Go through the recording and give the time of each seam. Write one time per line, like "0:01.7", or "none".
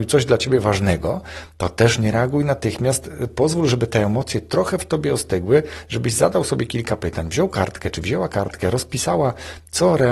none